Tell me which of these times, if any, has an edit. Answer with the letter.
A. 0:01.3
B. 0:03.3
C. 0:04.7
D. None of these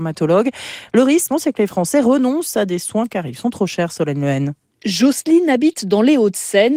A